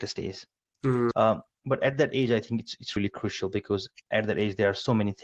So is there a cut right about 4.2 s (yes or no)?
no